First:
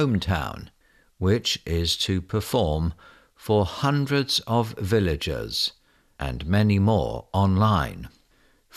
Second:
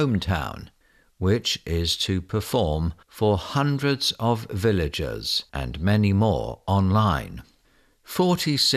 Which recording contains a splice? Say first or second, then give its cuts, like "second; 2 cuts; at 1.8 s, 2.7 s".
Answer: second; 2 cuts; at 3.0 s, 5.5 s